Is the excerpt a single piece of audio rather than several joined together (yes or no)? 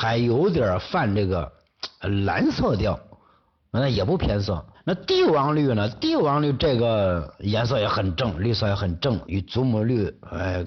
no